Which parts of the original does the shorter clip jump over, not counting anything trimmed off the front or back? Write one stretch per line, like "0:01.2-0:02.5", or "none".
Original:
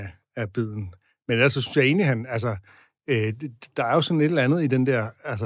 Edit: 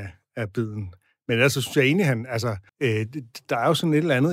0:02.7-0:03.0